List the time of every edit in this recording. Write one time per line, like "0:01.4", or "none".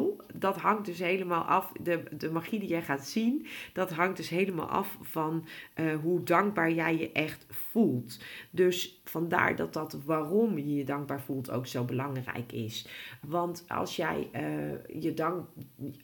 none